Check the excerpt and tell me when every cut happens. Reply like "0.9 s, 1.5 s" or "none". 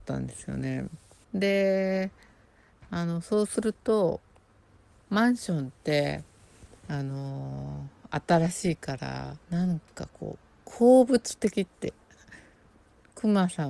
1.2 s, 9.4 s